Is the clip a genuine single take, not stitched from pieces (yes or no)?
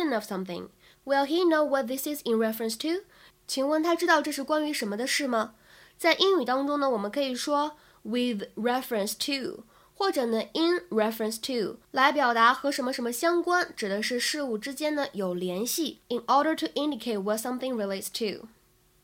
no